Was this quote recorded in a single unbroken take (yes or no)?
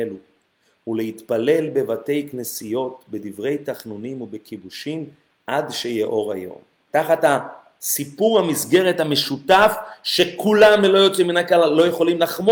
no